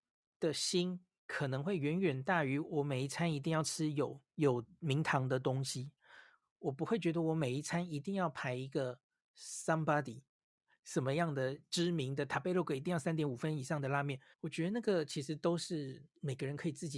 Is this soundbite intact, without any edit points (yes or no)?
no